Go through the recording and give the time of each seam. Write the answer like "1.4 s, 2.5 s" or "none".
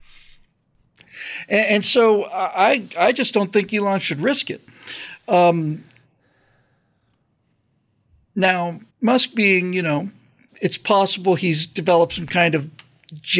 8.9 s, 10.5 s